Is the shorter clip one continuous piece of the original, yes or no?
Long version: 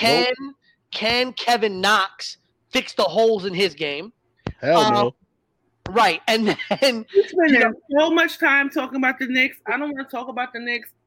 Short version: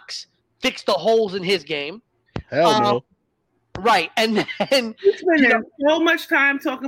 yes